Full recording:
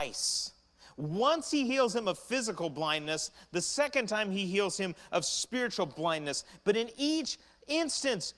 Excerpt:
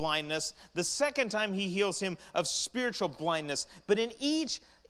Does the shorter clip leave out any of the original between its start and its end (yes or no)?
no